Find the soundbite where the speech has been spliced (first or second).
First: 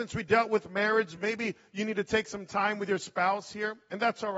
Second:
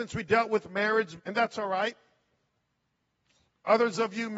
second